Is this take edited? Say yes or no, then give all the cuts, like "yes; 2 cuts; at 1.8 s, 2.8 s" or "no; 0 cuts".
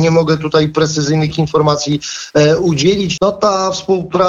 yes; 1 cut; at 3.2 s